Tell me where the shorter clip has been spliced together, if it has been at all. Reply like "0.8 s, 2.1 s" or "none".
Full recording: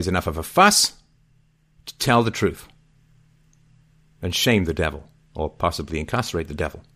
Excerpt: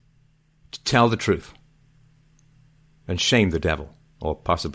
none